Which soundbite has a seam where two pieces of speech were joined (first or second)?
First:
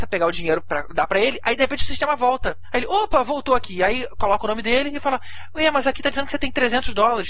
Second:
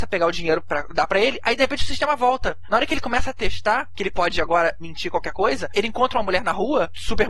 second